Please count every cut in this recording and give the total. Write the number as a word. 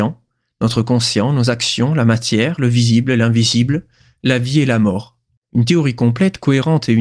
two